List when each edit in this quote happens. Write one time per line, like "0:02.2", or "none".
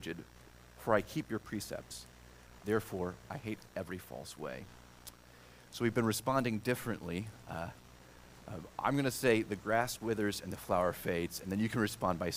0:02.6